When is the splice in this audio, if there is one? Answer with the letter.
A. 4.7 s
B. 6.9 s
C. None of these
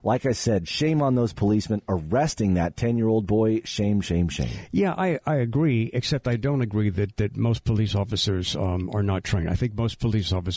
C